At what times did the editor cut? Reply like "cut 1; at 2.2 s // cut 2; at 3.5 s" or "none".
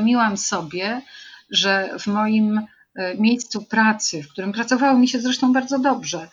none